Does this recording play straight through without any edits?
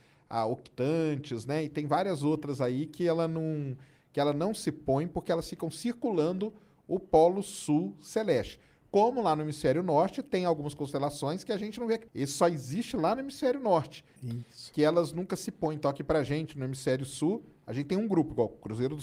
no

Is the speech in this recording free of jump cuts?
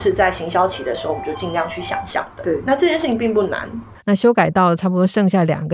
no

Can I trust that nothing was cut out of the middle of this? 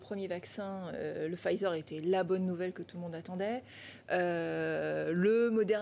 yes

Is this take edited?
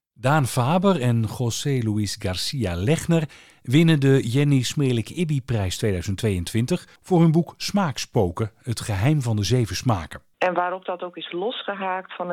yes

